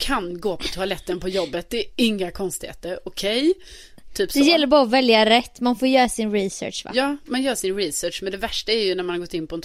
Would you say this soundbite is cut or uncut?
uncut